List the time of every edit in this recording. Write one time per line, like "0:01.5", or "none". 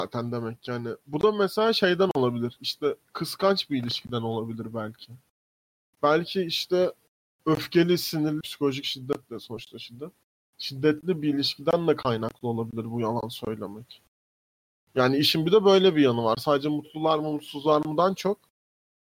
0:08.4